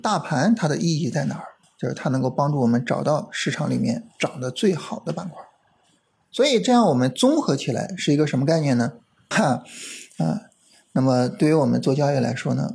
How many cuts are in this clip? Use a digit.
2